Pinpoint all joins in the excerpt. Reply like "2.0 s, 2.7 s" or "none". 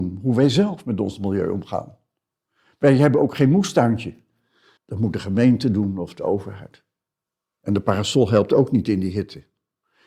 4.8 s, 7.6 s